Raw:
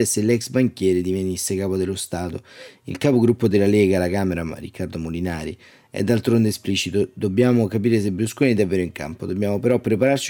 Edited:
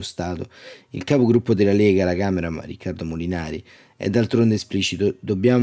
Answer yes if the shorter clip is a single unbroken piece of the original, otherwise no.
yes